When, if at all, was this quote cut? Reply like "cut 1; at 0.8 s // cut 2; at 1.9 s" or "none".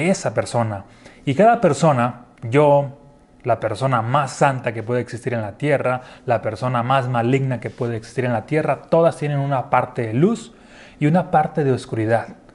cut 1; at 2.4 s